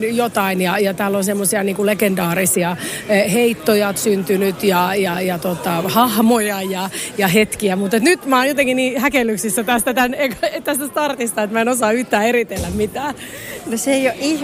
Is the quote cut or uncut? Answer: uncut